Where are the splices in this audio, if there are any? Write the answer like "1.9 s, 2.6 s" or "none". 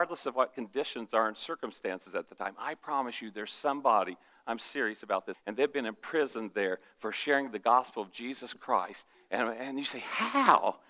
5.3 s, 9.1 s